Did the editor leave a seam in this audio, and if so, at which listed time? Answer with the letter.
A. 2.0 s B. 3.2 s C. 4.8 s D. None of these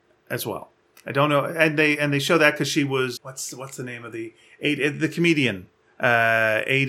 B